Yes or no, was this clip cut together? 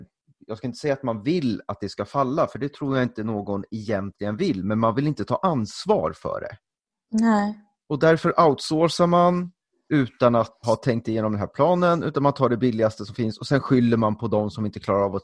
yes